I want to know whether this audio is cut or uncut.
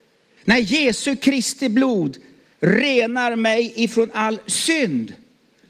uncut